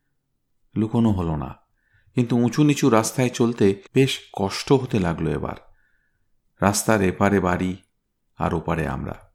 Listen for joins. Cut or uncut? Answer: cut